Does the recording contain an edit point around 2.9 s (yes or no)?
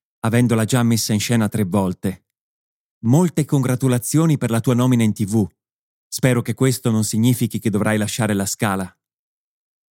yes